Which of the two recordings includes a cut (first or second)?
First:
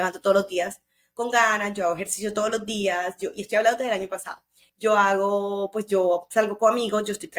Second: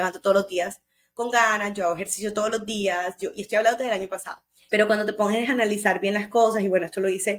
second